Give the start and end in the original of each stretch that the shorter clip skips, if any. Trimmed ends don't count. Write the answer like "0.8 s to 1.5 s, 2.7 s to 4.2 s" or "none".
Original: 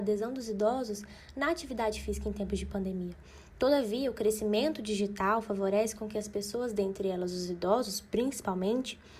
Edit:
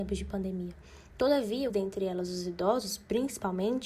4.1 s to 6.7 s